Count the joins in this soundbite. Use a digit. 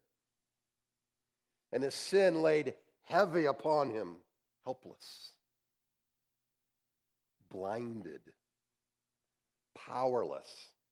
1